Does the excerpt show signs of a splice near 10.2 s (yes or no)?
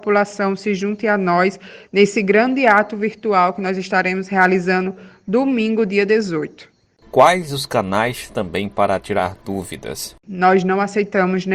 yes